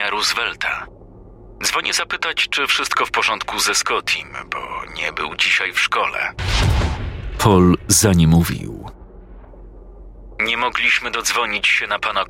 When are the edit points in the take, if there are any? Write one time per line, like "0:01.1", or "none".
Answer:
none